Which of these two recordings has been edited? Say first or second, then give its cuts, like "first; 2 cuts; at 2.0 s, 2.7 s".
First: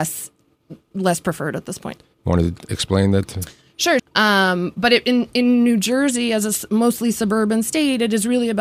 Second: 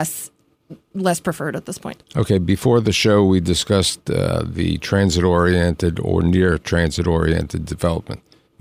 first; 2 cuts; at 2.0 s, 4.0 s